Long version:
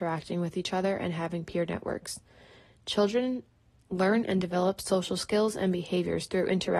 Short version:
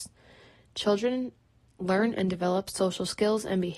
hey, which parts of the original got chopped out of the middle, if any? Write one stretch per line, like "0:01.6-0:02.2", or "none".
none